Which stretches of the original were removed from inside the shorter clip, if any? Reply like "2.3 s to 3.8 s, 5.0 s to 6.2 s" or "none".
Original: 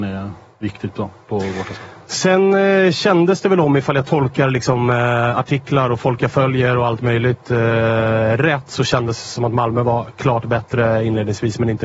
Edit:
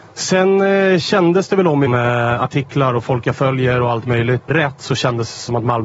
3.8 s to 4.8 s, 7.4 s to 8.4 s